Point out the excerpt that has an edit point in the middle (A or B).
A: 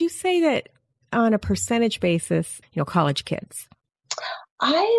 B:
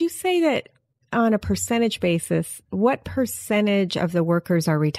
A